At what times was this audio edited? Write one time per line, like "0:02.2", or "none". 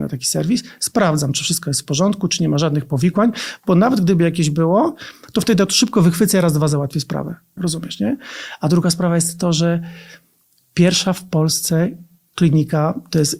0:07.6